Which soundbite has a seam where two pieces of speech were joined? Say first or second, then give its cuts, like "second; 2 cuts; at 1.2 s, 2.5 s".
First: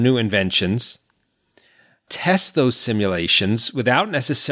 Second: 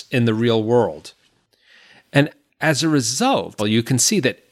second; 1 cut; at 3.6 s